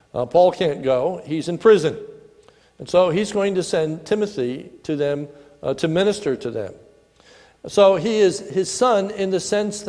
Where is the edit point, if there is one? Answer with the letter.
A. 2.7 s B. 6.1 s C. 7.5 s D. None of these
C